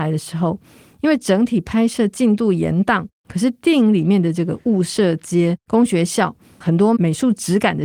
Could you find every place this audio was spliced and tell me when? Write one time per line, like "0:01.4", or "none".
0:03.2
0:06.6